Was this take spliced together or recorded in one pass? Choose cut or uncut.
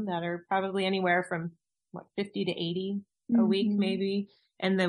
uncut